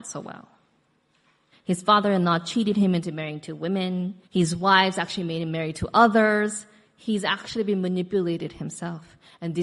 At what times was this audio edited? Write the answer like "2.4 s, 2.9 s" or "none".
1.5 s, 4.2 s